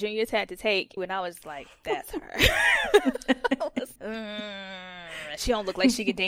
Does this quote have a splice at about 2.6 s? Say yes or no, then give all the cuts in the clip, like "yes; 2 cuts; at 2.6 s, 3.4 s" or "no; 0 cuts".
no; 2 cuts; at 1.0 s, 4.0 s